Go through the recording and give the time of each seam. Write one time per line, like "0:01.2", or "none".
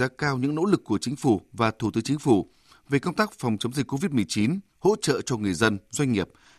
0:04.7

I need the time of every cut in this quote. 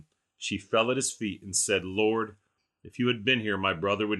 none

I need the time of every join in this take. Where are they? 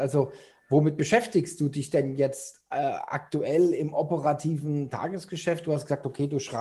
none

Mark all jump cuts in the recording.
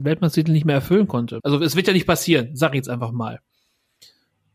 0:01.4

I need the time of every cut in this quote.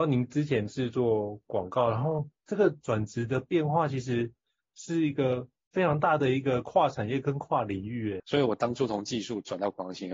0:08.2

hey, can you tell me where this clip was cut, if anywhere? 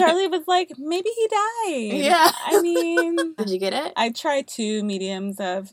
0:03.4

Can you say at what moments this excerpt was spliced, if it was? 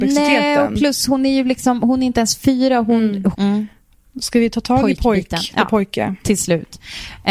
0:03.3

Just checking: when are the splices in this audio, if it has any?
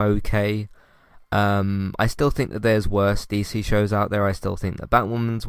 none

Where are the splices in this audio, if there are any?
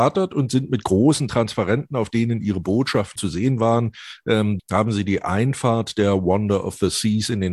0:03.2
0:04.6

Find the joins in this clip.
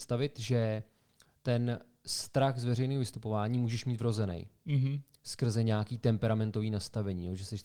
none

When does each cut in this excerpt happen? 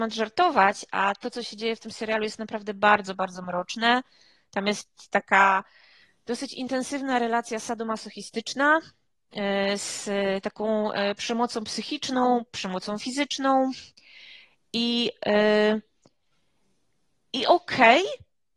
none

